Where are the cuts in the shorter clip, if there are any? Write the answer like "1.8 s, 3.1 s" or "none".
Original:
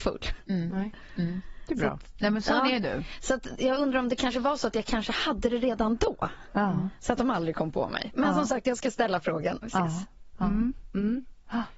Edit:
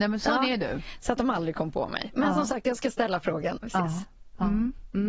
1.0 s